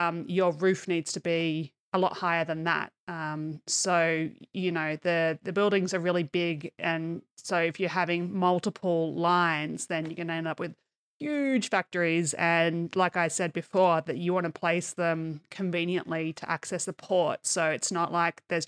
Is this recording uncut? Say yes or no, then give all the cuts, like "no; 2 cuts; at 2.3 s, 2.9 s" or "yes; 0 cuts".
yes; 0 cuts